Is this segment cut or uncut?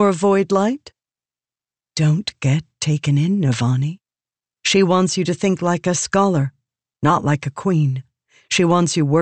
cut